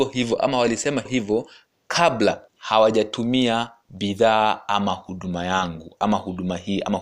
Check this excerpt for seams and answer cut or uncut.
cut